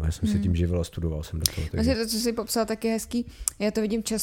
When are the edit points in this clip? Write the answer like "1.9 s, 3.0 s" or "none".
none